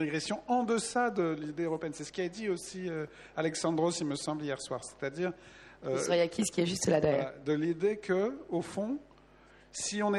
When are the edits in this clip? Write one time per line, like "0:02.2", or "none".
none